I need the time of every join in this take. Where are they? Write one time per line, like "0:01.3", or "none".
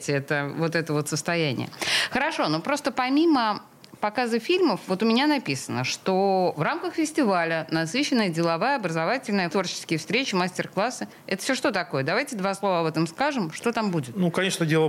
0:09.5